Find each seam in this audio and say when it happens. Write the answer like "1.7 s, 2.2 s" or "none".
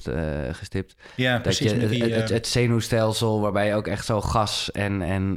none

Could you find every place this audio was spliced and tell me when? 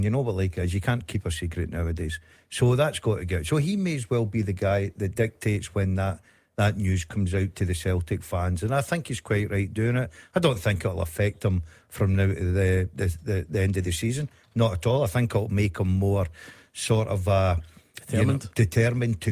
none

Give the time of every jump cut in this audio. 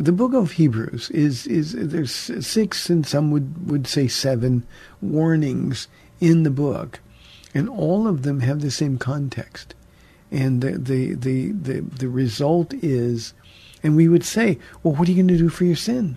13.8 s

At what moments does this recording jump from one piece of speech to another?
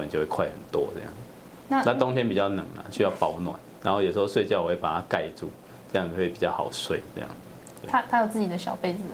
none

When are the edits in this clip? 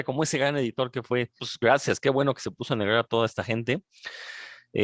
1.4 s

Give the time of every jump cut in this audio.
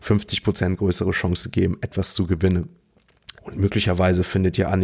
3.4 s

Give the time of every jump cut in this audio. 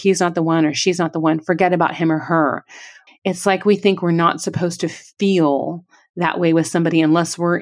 3.1 s

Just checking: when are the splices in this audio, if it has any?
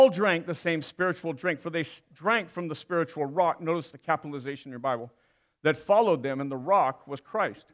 none

